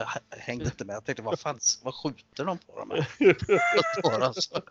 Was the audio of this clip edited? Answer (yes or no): no